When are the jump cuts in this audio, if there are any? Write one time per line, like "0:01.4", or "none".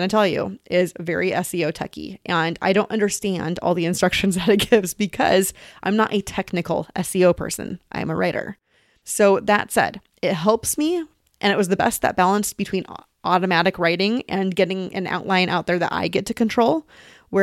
none